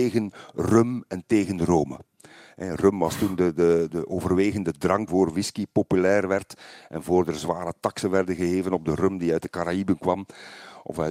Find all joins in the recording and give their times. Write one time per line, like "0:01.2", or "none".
0:03.9
0:05.1